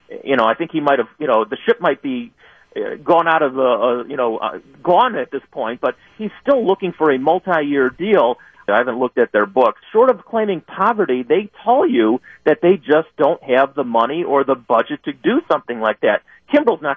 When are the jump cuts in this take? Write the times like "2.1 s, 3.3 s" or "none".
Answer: 8.7 s, 9.8 s